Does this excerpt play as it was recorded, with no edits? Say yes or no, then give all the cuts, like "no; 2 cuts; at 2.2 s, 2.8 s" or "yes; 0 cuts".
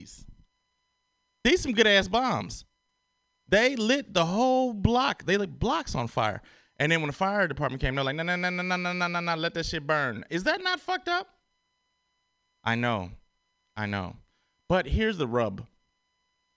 yes; 0 cuts